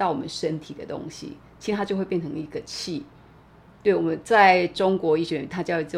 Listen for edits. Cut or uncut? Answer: uncut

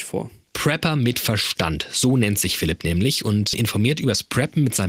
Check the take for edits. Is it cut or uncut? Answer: cut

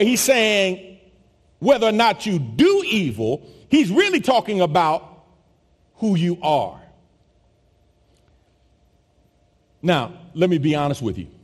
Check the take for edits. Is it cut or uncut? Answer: uncut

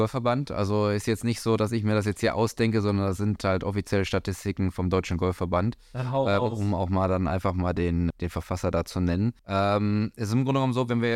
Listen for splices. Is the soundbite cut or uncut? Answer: cut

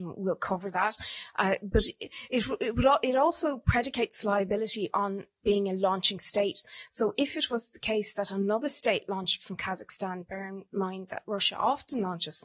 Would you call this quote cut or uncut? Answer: uncut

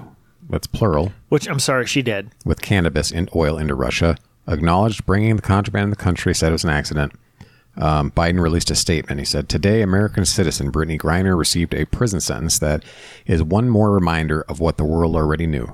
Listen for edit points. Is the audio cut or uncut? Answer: uncut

